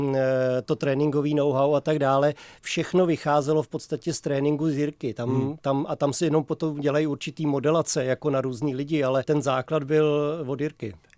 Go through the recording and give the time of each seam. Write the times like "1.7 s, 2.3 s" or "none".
9.2 s

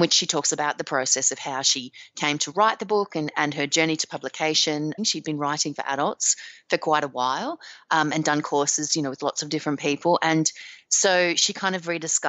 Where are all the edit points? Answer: 5.0 s

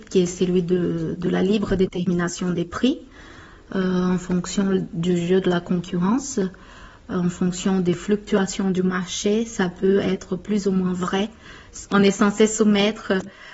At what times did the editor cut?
none

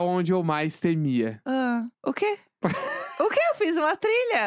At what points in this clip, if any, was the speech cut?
1.9 s

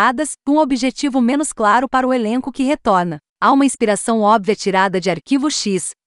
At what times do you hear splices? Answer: 3.3 s

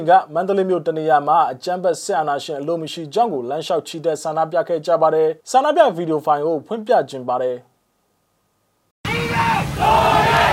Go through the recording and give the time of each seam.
5.4 s

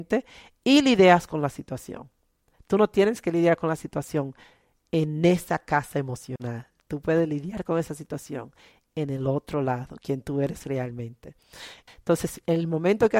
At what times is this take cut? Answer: 11.9 s

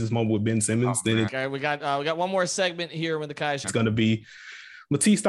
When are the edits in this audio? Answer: 1.3 s, 3.6 s

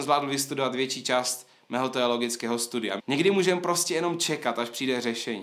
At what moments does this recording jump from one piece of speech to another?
3.0 s

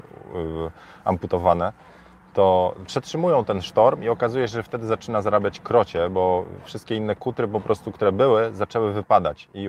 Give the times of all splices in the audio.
none

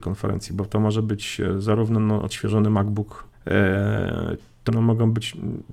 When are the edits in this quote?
3.3 s, 4.7 s

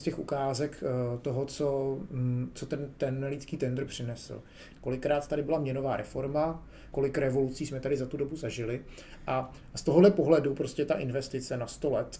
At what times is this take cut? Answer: 4.7 s, 6.9 s

